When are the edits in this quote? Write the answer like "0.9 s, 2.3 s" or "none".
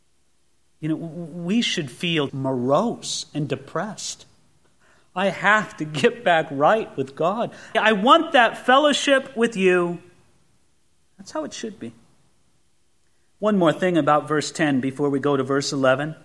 2.3 s, 7.7 s